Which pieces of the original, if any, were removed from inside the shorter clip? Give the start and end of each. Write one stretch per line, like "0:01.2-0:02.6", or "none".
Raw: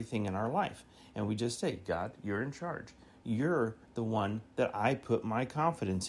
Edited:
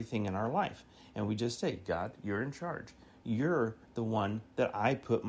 none